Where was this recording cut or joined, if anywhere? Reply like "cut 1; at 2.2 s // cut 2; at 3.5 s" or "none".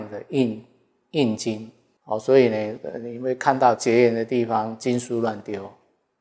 cut 1; at 2.0 s